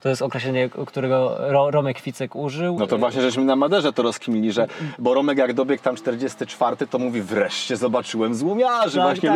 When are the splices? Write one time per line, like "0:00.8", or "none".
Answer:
none